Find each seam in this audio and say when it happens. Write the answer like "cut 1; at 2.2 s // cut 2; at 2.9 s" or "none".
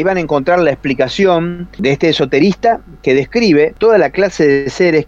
none